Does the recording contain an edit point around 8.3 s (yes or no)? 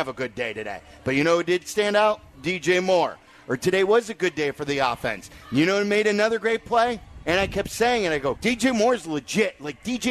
yes